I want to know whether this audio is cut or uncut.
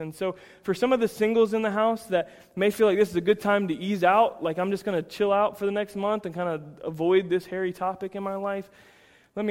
uncut